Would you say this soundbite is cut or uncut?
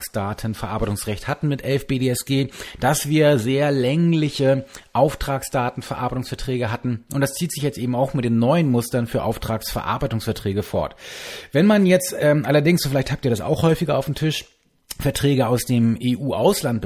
uncut